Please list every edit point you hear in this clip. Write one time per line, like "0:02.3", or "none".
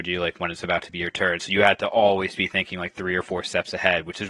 none